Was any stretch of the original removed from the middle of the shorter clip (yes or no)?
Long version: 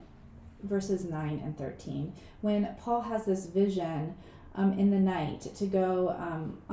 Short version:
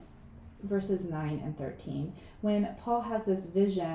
no